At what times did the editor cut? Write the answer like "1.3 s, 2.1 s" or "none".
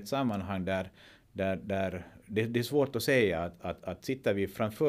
none